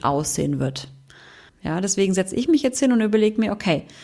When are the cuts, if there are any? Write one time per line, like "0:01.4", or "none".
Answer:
0:01.5